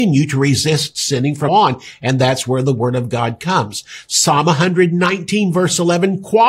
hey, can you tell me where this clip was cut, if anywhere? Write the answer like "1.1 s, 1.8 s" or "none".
1.5 s